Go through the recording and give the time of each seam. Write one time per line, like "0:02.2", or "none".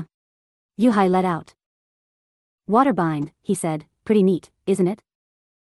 none